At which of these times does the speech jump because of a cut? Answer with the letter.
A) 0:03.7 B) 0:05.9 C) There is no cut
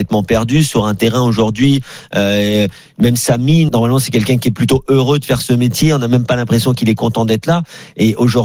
A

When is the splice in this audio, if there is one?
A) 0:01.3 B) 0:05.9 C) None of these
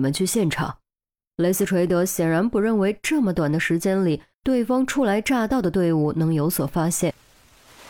A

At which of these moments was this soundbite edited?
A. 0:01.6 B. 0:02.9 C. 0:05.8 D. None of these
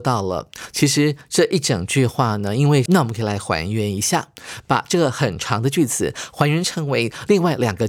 B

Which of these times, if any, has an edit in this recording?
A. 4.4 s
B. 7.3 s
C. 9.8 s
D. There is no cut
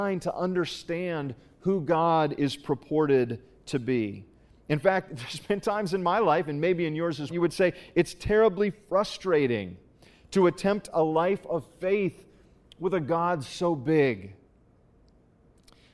B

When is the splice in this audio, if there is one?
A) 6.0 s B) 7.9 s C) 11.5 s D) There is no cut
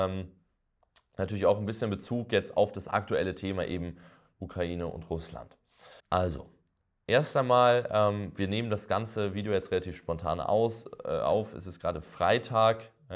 A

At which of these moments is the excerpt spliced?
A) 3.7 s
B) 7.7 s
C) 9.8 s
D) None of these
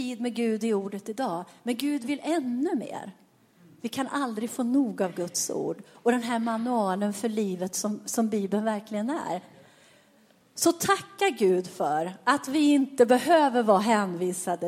D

